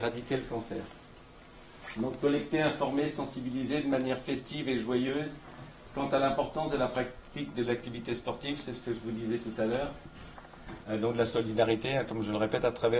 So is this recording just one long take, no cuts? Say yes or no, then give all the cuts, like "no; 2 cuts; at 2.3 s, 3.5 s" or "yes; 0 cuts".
no; 1 cut; at 10.8 s